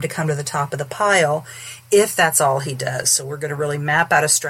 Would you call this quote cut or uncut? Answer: uncut